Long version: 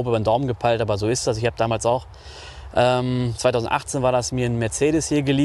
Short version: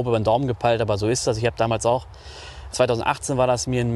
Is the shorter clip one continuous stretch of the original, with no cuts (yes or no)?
no